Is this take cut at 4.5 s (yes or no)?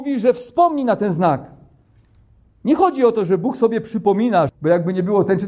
yes